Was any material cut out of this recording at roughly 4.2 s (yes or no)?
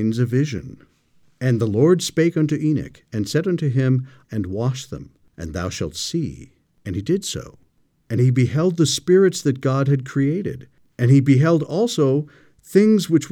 yes